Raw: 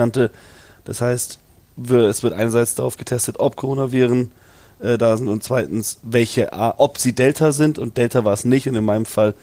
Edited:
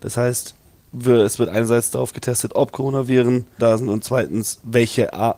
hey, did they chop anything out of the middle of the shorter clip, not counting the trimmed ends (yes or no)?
yes